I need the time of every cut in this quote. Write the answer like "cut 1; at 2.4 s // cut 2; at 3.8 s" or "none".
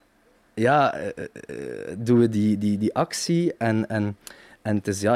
none